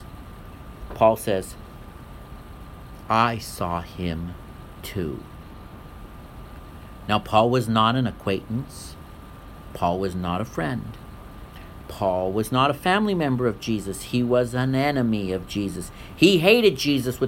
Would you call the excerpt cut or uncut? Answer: uncut